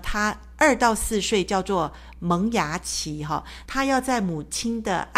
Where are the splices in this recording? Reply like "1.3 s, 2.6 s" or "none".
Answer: 3.6 s